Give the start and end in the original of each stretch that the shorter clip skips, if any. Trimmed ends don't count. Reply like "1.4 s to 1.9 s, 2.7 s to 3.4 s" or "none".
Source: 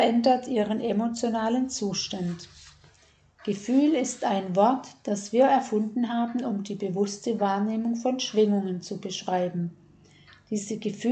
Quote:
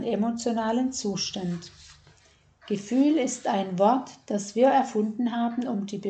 none

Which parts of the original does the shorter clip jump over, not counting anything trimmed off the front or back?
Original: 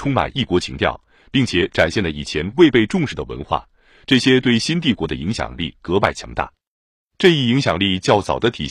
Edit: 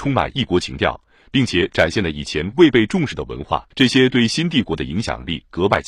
3.7 s to 4.0 s

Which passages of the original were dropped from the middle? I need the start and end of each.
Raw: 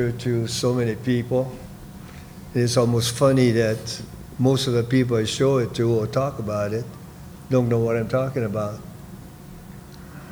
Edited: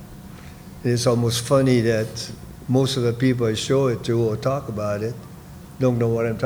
none

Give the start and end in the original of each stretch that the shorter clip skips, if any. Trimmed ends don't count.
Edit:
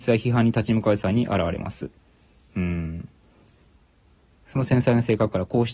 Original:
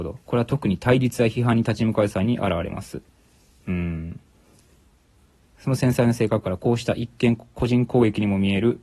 none

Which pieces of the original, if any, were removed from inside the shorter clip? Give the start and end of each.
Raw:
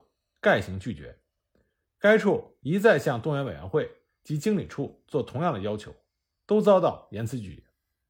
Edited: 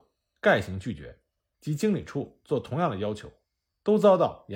1.5 s to 4.2 s

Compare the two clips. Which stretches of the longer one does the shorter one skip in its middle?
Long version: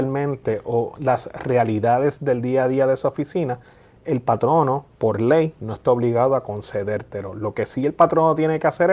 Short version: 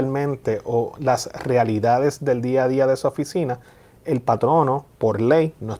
none

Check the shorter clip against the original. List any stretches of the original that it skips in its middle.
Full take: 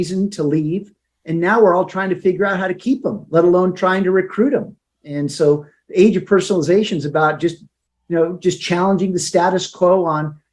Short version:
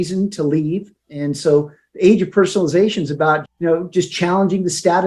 1.0 s to 5.0 s, 7.4 s to 7.9 s

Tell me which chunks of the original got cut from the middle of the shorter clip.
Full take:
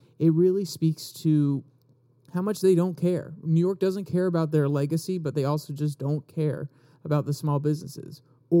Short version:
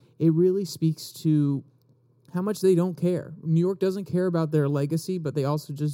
none

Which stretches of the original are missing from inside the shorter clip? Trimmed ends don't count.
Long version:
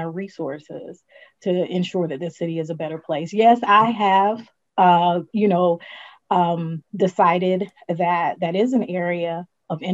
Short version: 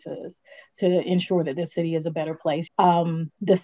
3.3 s to 6.2 s

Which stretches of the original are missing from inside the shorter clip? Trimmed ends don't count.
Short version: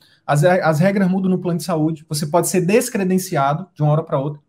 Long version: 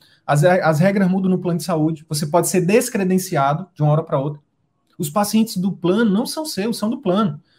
none

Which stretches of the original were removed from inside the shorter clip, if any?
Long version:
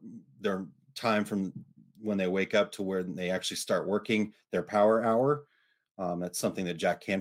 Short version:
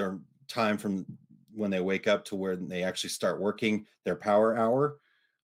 none

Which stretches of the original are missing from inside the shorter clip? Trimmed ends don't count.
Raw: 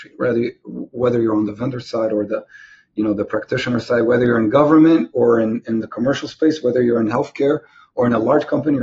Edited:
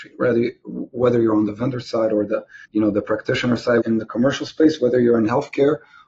2.6 s to 2.9 s, 4.0 s to 5.6 s

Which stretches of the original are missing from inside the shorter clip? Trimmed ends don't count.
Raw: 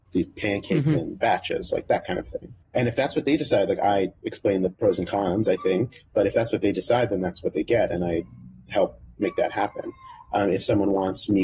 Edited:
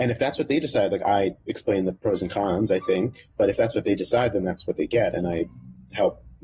none

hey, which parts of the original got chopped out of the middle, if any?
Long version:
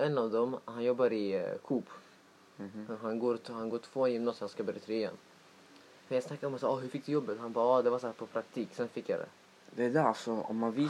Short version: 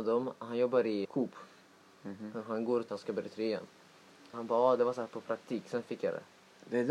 1.3 s to 1.6 s, 3.4 s to 4.4 s, 5.8 s to 7.4 s

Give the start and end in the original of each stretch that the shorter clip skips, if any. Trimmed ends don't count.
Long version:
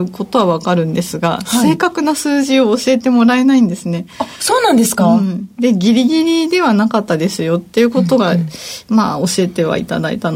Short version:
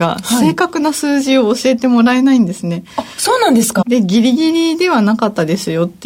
5.0 s to 5.5 s

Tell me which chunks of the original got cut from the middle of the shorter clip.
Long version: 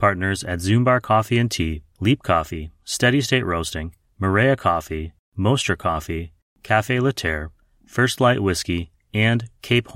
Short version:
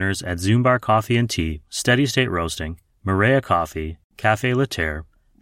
1.8 s to 2.8 s, 5.3 s to 6.6 s

